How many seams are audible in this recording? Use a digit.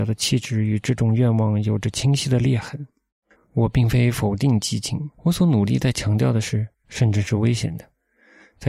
3